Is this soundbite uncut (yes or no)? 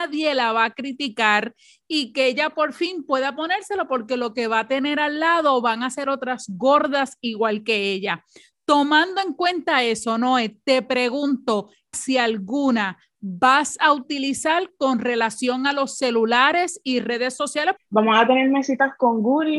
no